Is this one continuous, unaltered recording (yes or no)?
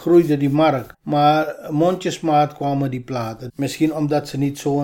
no